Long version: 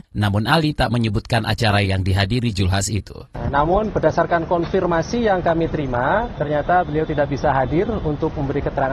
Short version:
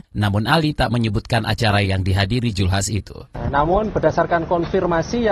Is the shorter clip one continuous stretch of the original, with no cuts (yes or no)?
yes